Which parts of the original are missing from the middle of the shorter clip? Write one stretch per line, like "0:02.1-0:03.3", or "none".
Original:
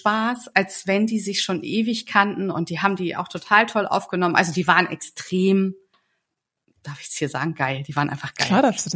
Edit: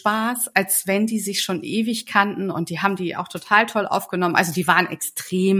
none